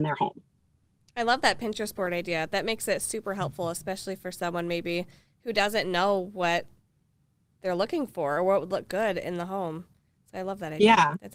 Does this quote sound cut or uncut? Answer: uncut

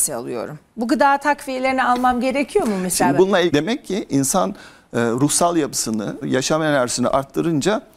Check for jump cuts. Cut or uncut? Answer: cut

